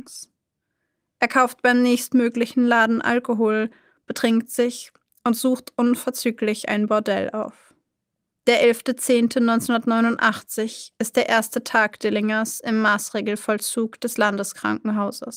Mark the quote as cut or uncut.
cut